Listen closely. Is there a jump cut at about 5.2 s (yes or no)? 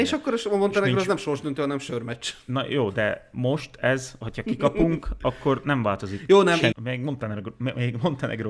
no